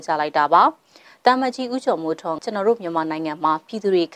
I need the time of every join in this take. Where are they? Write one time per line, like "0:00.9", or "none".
0:02.4